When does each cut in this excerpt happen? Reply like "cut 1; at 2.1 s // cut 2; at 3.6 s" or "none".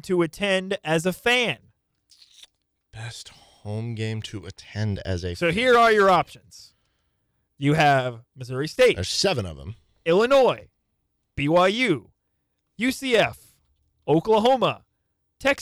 none